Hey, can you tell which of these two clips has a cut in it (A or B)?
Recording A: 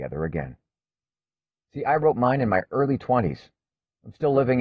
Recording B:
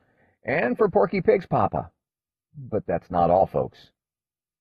A